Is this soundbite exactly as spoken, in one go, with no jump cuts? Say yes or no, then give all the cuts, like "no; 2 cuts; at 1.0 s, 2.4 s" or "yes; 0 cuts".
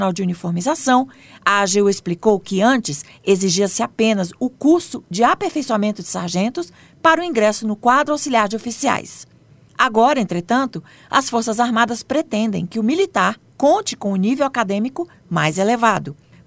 yes; 0 cuts